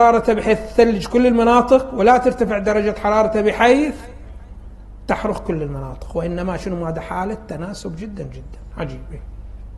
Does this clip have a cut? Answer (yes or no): no